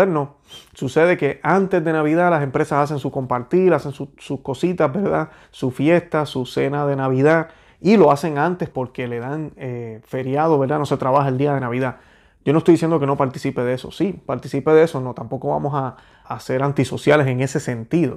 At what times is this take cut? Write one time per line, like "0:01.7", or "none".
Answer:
0:08.7
0:16.2

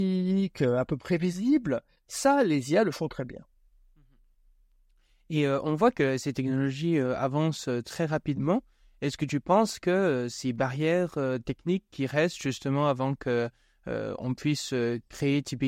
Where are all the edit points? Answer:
none

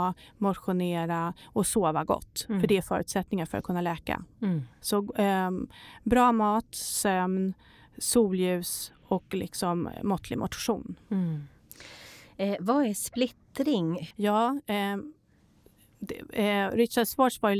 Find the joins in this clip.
0:14.1

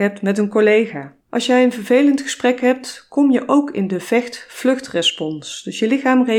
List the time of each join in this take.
0:01.2

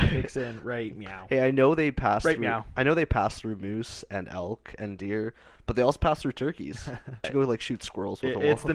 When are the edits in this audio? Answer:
0:07.2

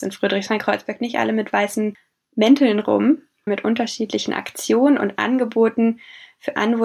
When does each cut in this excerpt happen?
0:03.5

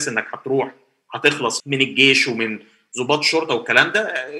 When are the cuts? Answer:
0:01.6

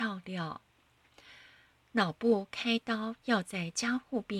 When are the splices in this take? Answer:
none

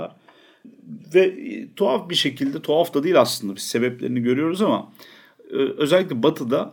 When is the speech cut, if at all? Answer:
none

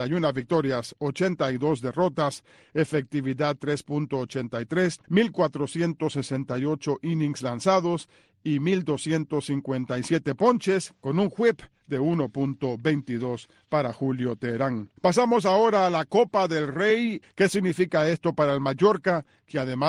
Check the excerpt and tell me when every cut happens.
0:05.0
0:15.0
0:17.2

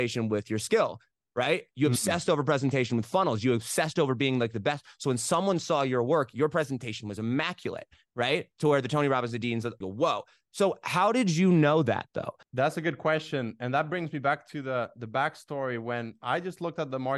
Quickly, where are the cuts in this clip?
0:09.8
0:12.4

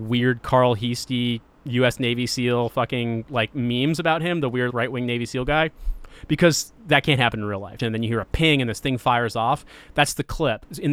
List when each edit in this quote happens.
0:04.7
0:07.8

